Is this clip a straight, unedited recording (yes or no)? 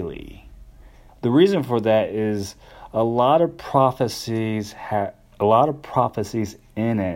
no